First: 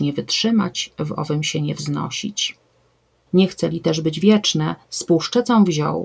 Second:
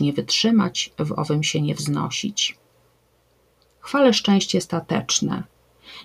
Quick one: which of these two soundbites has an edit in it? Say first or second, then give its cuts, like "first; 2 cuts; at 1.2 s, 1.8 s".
first; 1 cut; at 3.3 s